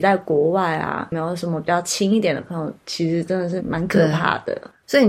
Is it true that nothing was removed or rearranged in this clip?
no; 1 cut; at 3.6 s

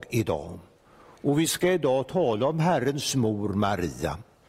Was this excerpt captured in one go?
yes; 0 cuts

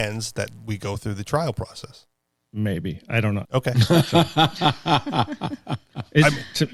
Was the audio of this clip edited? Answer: yes; 1 cut; at 3.4 s

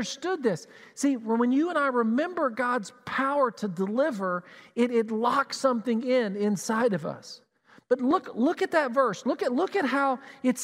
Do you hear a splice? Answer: no; 0 cuts

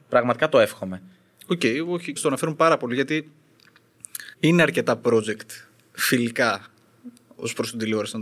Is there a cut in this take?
yes; 2 cuts; at 2.2 s, 4.3 s

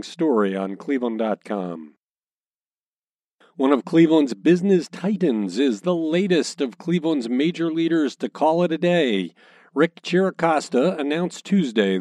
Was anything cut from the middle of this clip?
no; 0 cuts

